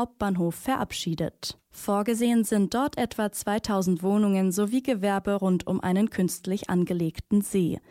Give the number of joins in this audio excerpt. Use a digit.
1